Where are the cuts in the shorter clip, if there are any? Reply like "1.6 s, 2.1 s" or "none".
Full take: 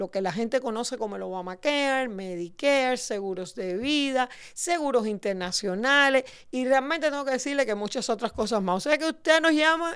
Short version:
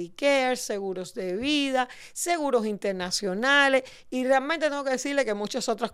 none